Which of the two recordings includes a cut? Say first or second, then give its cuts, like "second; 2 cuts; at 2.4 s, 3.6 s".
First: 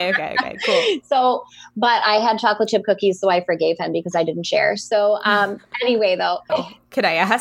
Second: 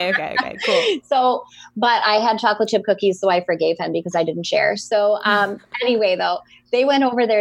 first; 1 cut; at 6.5 s